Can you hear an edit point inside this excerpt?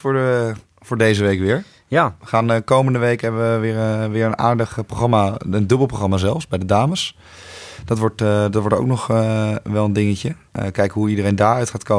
no; 0 cuts

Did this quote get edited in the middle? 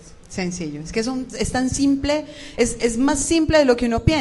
no; 0 cuts

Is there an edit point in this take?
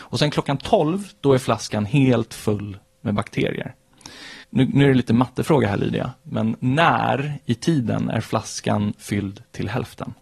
yes; 1 cut; at 4.4 s

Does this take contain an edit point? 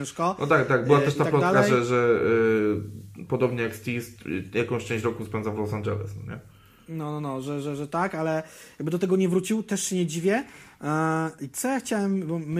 no; 0 cuts

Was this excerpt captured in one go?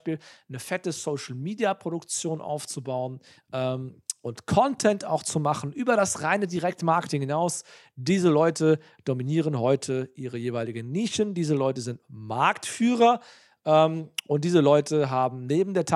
yes; 0 cuts

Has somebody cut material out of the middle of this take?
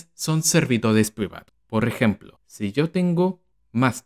no; 0 cuts

